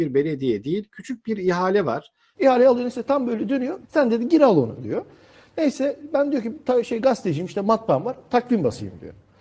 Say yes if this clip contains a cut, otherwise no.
yes